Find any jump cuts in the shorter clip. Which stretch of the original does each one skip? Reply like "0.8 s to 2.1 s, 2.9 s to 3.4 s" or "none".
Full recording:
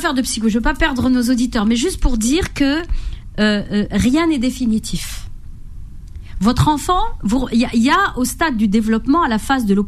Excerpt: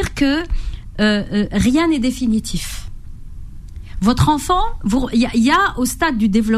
none